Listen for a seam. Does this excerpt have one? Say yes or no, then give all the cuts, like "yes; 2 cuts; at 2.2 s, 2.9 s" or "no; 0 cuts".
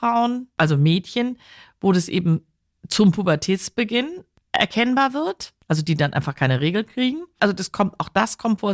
yes; 1 cut; at 7.4 s